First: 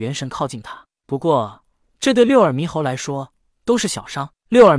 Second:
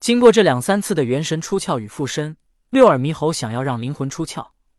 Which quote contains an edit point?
first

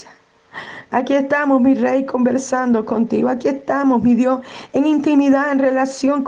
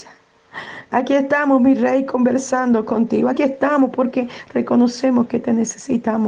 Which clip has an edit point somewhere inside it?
second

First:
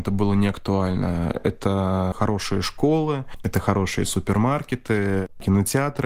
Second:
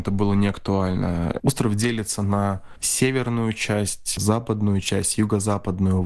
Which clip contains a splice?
second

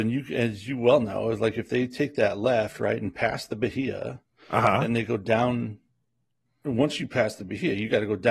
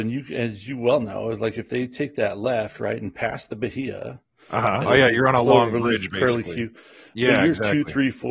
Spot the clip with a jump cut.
second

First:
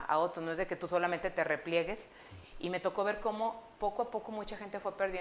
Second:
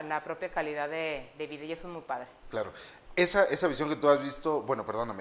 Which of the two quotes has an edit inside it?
first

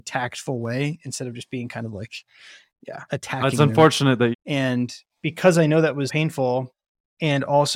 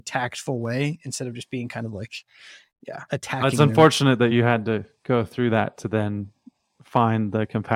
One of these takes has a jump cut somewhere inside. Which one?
first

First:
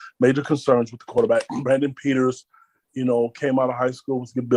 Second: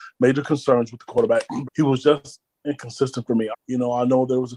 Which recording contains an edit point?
second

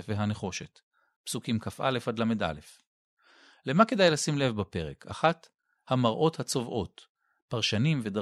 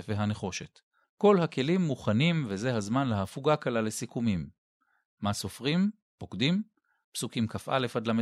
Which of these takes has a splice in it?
second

